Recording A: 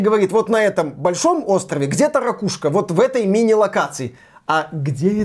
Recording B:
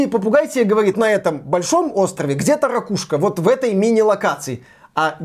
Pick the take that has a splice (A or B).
B